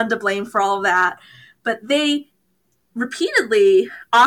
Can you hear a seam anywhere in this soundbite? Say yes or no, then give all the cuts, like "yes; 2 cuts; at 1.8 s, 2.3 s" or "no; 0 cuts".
no; 0 cuts